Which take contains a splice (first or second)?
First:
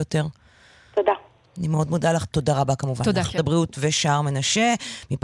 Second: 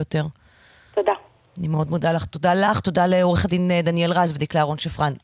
first